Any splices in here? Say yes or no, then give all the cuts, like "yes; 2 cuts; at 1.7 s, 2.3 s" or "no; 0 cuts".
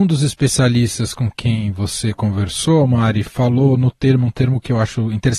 no; 0 cuts